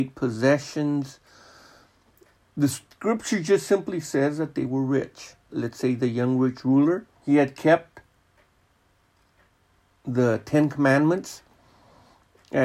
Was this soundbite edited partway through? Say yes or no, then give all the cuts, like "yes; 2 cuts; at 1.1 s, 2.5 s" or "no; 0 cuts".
yes; 2 cuts; at 5.5 s, 7.2 s